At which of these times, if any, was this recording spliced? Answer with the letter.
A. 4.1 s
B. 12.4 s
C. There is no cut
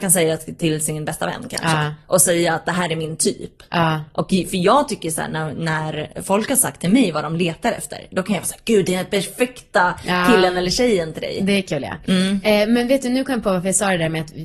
C